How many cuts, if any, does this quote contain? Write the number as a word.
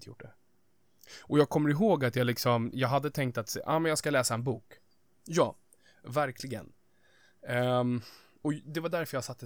two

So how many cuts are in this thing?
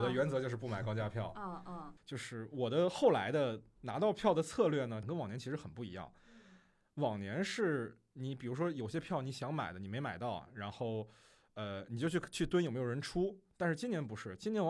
one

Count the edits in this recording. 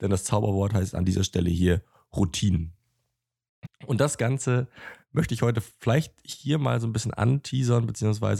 one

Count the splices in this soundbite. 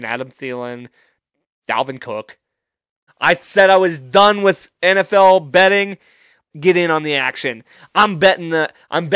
two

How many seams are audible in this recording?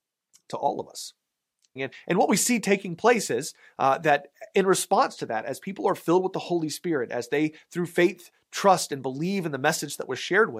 one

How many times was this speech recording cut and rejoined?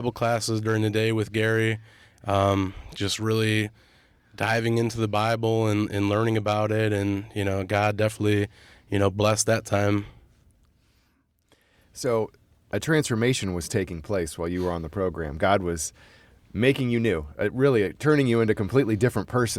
zero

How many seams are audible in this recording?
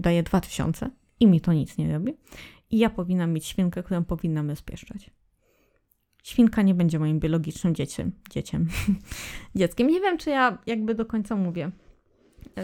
zero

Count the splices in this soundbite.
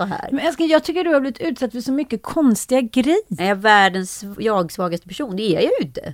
one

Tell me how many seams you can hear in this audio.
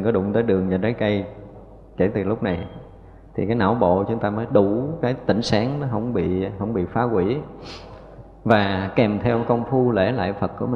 zero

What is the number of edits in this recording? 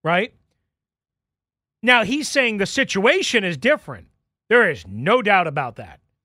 one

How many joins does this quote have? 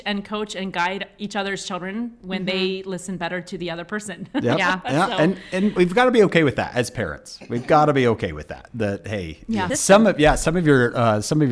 one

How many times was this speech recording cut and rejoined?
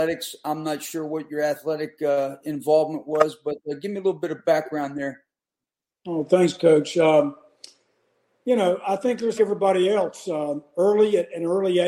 one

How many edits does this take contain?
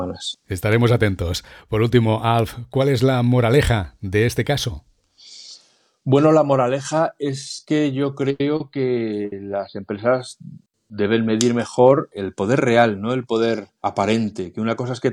zero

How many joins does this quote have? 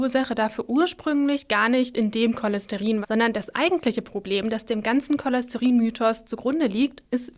one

